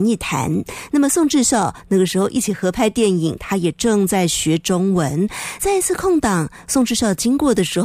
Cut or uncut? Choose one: uncut